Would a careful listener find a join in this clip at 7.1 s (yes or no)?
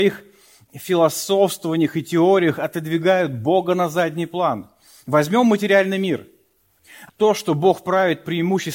yes